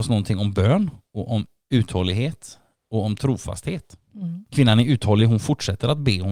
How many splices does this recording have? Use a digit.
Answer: 0